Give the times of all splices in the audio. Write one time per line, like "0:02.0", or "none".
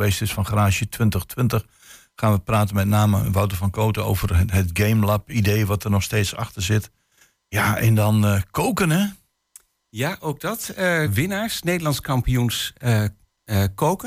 0:11.1